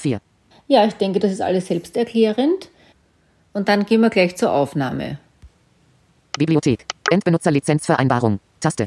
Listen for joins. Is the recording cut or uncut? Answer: cut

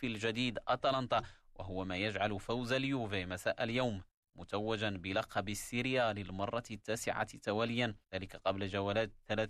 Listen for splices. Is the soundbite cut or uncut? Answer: cut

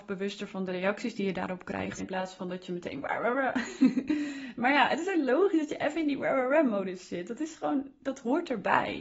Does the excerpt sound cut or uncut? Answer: cut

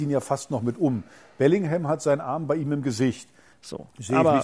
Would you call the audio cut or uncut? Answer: cut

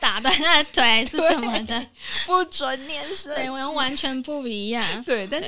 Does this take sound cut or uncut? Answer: uncut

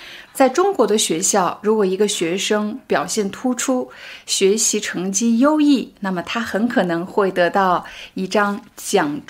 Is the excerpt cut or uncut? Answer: uncut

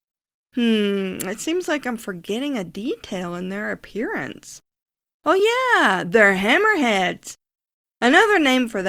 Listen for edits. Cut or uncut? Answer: uncut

